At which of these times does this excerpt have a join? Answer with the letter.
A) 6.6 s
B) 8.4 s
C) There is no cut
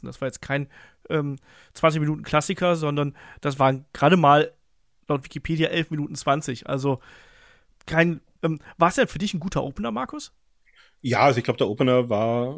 B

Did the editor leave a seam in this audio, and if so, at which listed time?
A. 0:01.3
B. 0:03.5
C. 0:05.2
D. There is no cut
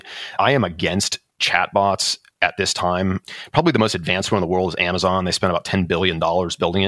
D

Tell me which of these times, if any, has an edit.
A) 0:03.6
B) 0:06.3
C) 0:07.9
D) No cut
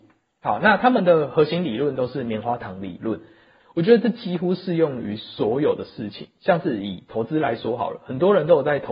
A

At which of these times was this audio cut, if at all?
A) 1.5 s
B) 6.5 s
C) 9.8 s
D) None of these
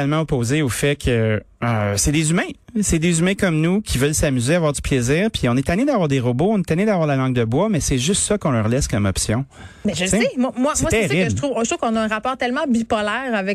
A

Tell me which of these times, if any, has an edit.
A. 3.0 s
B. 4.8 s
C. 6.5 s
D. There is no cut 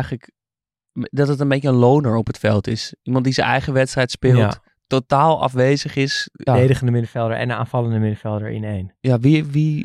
C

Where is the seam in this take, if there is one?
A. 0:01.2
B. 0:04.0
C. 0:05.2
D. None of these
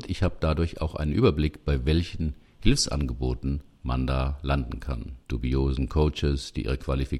C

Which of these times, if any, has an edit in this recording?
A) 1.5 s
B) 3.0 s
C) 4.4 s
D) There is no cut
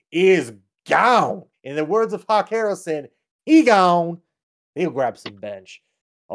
A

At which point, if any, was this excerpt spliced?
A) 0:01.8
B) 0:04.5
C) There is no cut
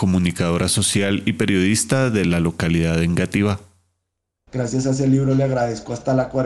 B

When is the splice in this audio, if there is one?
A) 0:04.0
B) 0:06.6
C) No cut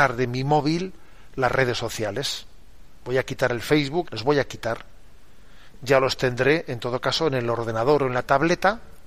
A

